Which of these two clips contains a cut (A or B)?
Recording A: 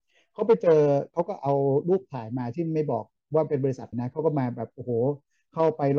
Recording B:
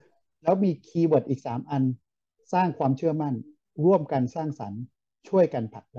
A